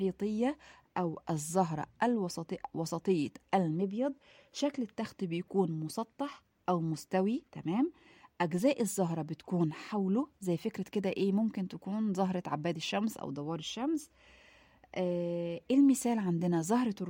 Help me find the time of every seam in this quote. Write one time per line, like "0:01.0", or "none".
0:07.5